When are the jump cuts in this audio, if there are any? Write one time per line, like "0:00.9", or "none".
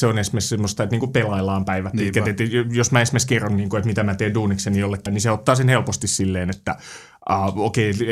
0:05.1